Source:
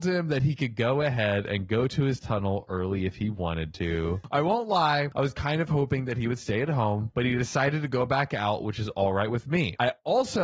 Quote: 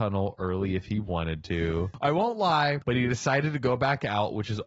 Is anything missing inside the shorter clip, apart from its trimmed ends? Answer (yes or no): yes